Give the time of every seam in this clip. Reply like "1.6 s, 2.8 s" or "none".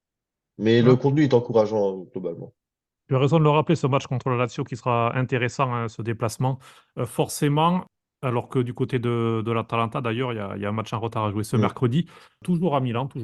none